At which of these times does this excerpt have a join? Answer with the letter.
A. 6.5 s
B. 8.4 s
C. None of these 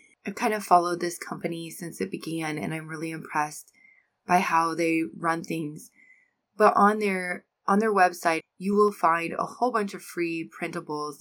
B